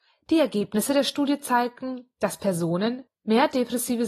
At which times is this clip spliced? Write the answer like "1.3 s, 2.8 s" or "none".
3.1 s